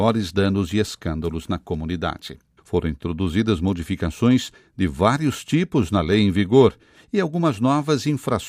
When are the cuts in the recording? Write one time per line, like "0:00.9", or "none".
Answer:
0:02.6